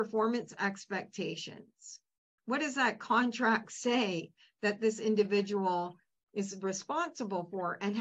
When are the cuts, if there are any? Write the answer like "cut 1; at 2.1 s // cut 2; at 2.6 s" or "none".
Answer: cut 1; at 2.4 s